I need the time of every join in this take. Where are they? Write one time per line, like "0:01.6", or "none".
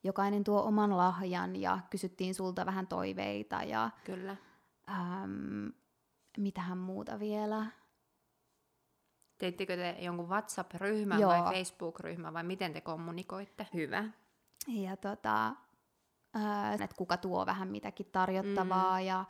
0:13.7
0:16.8